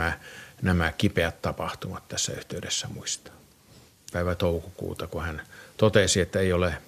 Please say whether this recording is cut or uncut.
cut